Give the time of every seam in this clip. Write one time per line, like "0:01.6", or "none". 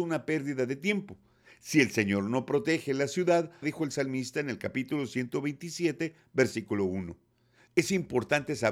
0:03.6
0:07.7

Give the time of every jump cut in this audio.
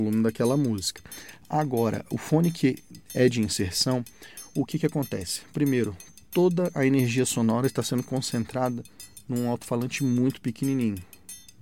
none

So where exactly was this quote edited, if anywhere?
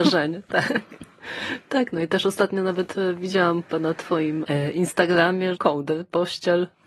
0:04.4
0:05.6

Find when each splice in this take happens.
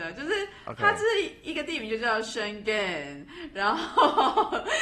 none

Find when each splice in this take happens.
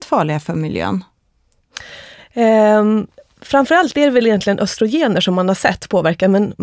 none

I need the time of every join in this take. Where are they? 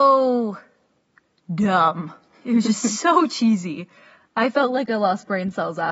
none

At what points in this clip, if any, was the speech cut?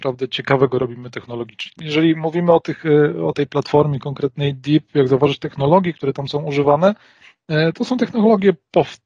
0:01.8

